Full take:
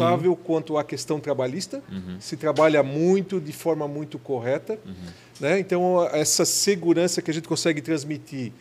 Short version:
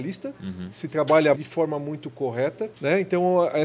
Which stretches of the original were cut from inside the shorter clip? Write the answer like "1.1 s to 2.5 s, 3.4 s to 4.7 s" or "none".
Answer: 2.8 s to 3.4 s, 4.8 s to 5.3 s